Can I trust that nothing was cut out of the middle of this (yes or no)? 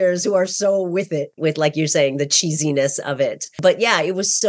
no